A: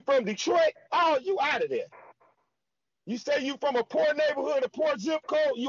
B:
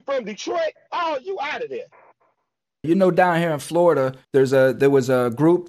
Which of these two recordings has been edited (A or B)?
B